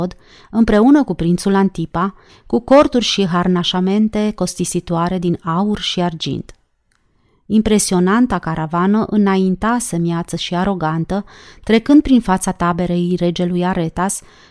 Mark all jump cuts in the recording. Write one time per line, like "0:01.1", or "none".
0:02.3